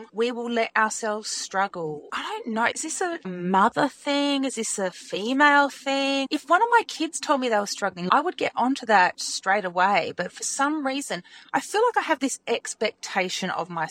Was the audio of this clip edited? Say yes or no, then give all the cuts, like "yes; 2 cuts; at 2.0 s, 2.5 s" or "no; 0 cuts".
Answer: no; 0 cuts